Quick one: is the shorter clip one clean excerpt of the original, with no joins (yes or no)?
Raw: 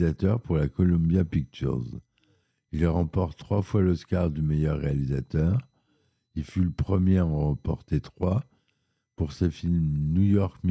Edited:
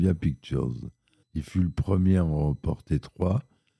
no